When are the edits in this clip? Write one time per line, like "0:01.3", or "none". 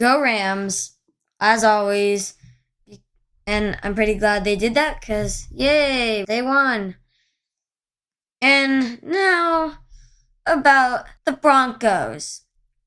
0:06.2
0:11.2